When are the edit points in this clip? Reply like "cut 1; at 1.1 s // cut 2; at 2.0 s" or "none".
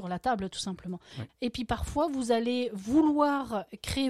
cut 1; at 1.3 s